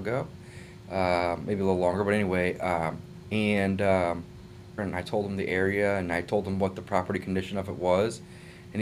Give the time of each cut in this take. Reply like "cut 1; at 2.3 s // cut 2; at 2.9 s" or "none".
cut 1; at 3.2 s // cut 2; at 4.8 s

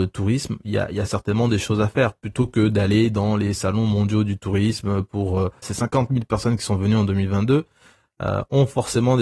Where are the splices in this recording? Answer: cut 1; at 5.6 s

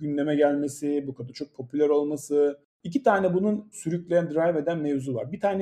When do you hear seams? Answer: none

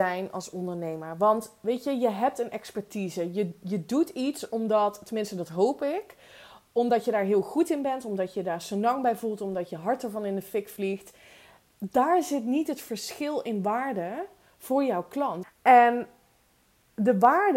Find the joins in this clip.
cut 1; at 15.4 s

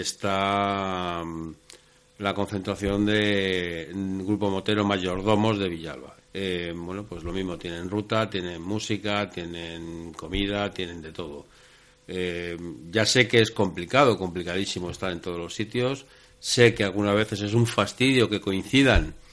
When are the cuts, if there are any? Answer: cut 1; at 6.2 s

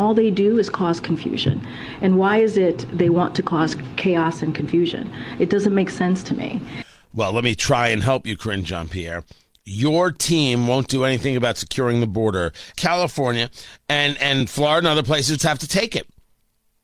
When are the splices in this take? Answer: cut 1; at 12.7 s // cut 2; at 15.4 s

